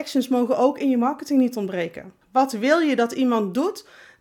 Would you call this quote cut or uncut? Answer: cut